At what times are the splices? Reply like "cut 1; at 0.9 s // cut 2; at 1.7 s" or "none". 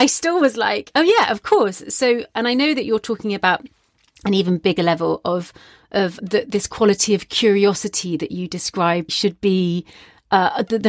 cut 1; at 6.2 s // cut 2; at 9.1 s